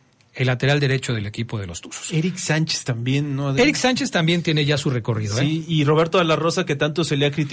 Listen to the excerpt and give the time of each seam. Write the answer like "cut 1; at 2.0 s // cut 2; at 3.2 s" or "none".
none